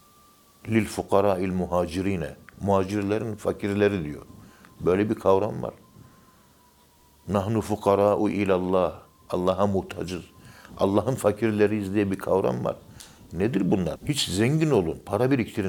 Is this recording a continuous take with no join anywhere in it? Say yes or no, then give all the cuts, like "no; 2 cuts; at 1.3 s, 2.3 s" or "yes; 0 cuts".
no; 1 cut; at 14.0 s